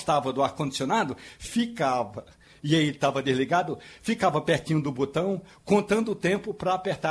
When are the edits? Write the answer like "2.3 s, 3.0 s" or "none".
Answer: none